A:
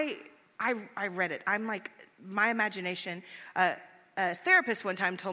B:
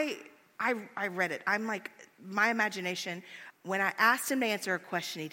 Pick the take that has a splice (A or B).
B